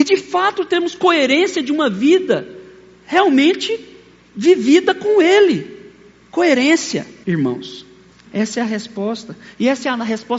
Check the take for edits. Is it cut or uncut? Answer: cut